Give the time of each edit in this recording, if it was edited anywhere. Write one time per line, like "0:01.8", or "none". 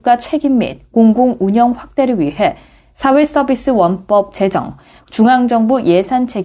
none